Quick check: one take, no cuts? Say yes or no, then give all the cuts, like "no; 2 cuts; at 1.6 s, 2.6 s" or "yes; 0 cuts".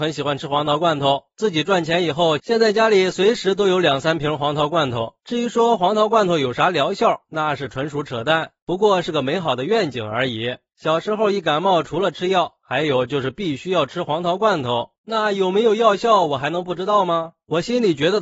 yes; 0 cuts